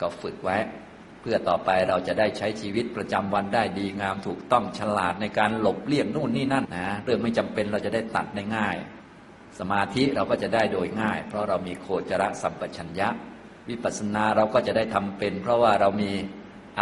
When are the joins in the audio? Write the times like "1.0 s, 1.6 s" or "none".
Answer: 6.6 s